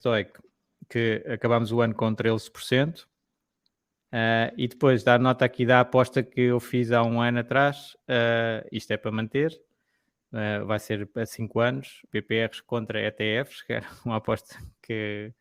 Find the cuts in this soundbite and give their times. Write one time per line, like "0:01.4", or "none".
0:03.9
0:12.1